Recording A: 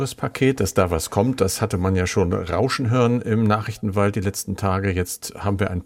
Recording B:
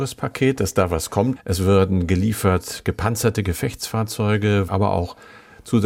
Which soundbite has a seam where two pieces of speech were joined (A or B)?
B